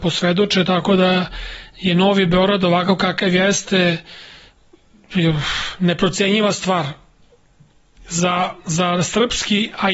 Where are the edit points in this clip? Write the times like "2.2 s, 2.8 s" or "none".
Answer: none